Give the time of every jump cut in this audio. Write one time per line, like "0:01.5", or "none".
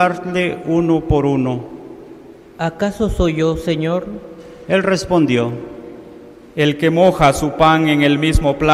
none